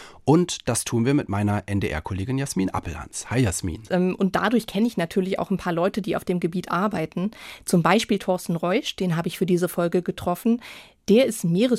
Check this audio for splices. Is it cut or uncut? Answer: cut